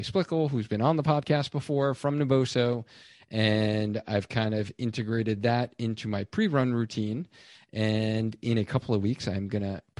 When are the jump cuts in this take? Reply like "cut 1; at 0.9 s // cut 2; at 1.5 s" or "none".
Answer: none